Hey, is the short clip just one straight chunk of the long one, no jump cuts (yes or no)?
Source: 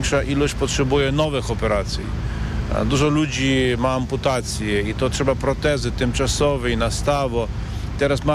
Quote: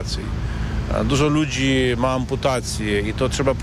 yes